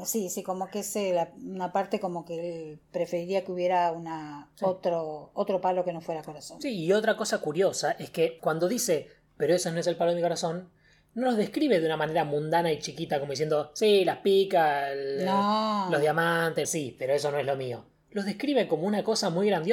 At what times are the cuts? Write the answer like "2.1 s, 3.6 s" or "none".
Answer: 16.6 s